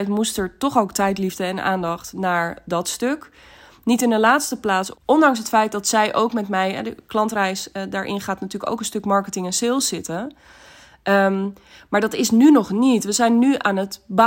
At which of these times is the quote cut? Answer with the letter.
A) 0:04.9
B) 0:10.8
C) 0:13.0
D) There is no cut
A